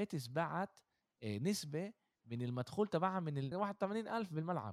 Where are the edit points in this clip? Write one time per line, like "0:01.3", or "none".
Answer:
0:03.5